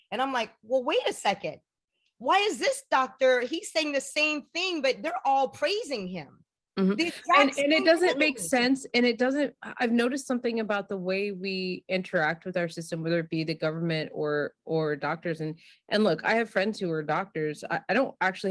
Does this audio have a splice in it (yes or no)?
no